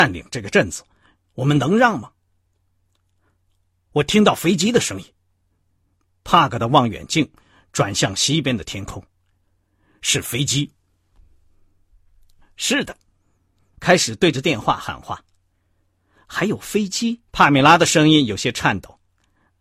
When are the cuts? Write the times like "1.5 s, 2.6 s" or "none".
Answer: 13.7 s, 17.3 s